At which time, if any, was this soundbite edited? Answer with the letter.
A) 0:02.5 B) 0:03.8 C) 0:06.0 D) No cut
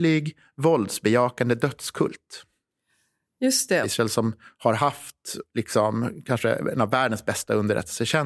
B